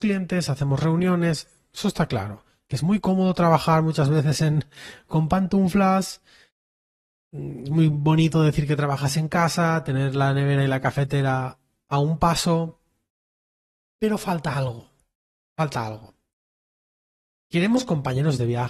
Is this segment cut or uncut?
uncut